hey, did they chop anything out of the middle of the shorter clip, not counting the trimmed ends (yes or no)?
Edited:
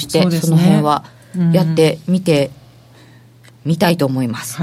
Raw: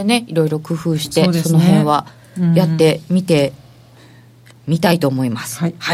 no